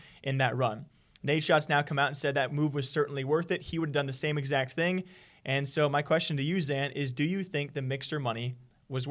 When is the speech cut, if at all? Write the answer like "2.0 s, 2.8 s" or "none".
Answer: none